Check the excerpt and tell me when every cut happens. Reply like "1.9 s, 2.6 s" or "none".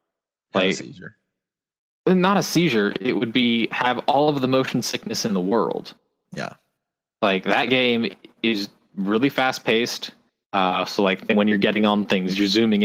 10.4 s